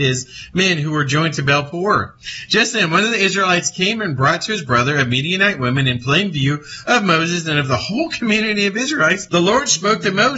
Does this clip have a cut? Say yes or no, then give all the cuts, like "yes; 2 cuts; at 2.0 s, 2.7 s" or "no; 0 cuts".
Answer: yes; 1 cut; at 9.3 s